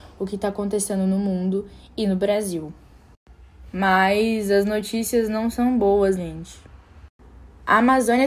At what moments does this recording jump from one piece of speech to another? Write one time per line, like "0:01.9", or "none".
0:03.7
0:06.2